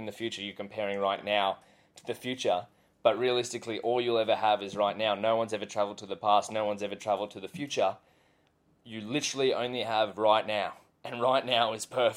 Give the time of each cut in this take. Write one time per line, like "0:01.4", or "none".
none